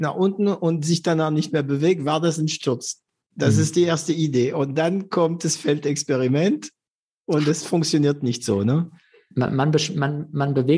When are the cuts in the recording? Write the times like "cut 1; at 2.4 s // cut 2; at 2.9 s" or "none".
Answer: none